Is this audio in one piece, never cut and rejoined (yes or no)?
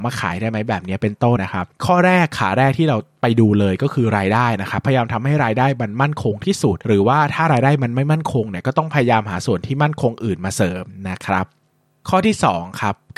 no